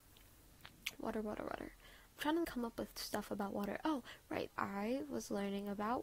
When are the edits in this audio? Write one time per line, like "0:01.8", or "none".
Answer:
0:01.0
0:02.4
0:04.5